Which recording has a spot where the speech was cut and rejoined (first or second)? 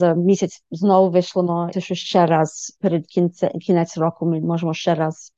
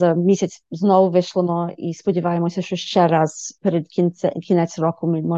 first